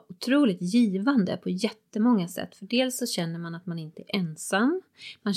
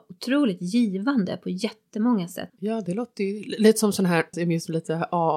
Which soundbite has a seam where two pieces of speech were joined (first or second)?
second